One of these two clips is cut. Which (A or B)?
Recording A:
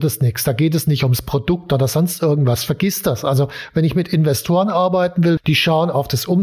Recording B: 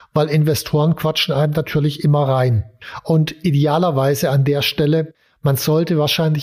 A